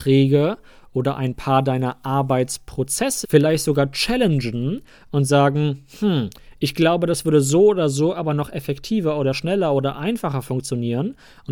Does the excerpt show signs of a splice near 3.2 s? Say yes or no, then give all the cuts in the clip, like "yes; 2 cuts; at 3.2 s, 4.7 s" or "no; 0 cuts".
yes; 1 cut; at 3.2 s